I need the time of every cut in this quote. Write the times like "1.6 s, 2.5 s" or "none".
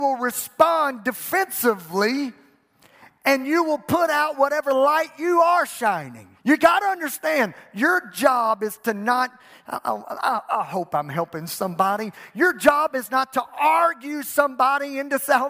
6.4 s